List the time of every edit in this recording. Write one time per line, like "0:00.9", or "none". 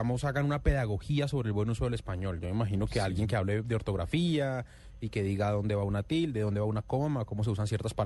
none